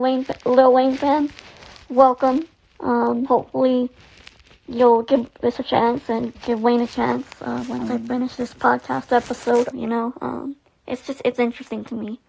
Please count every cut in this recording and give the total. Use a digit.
1